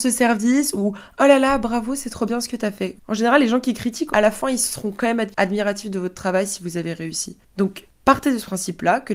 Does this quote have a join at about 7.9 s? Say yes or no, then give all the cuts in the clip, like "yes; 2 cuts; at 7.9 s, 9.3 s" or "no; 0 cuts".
no; 2 cuts; at 3.0 s, 4.1 s